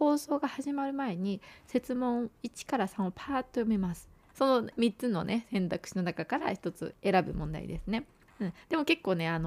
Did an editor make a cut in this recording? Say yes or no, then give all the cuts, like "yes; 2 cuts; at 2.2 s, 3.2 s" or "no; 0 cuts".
yes; 1 cut; at 4.3 s